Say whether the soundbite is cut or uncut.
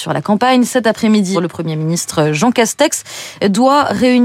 cut